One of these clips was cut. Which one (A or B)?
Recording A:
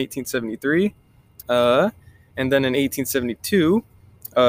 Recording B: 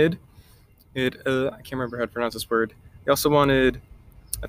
A